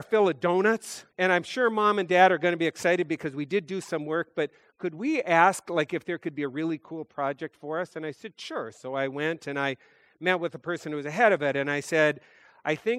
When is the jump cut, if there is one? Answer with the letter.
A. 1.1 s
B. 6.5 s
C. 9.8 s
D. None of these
A